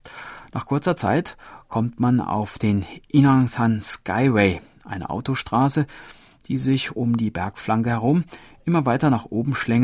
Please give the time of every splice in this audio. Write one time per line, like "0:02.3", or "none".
none